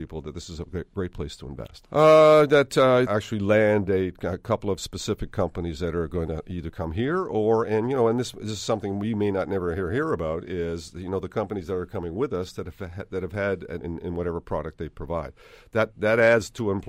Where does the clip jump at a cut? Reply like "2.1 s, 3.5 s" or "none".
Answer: 1.8 s, 3.1 s, 13.8 s

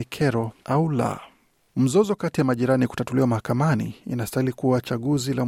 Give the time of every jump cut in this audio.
none

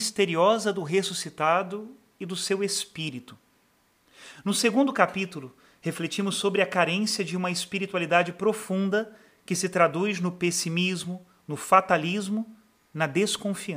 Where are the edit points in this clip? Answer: none

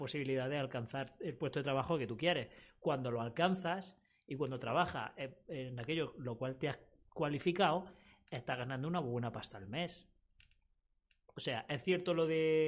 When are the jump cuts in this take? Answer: none

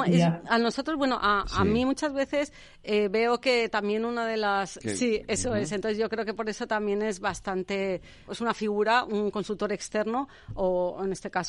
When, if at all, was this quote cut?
4.8 s, 8.3 s

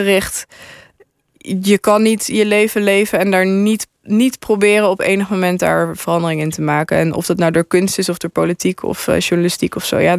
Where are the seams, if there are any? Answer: none

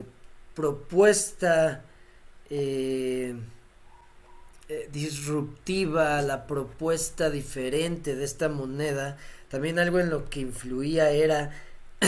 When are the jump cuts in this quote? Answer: none

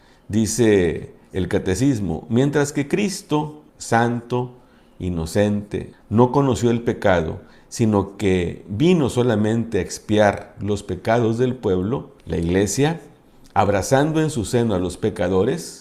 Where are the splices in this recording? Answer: 3.7 s, 5.9 s, 12.2 s

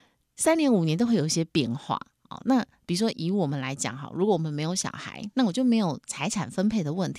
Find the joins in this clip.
3.1 s

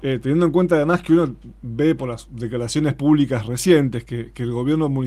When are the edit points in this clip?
4.1 s

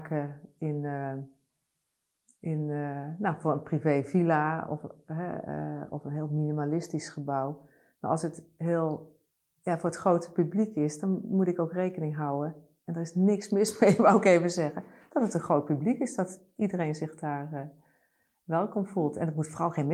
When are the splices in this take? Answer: none

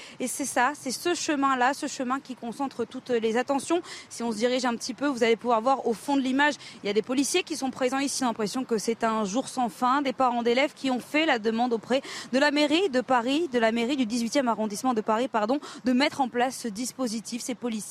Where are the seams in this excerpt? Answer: 8.2 s

